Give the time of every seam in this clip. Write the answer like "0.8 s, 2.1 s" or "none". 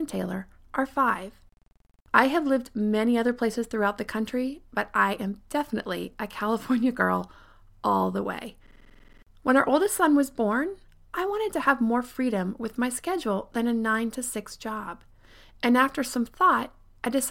none